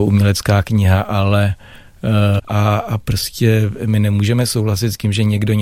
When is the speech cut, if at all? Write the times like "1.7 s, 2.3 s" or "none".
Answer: 2.4 s